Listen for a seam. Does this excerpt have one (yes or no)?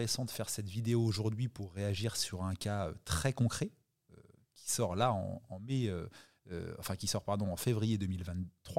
no